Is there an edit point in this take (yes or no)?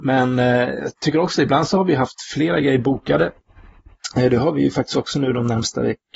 no